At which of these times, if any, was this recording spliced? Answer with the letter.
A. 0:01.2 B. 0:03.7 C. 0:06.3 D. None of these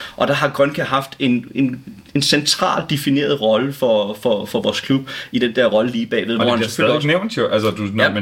D